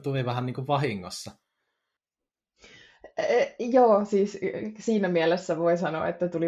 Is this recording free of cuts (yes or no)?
yes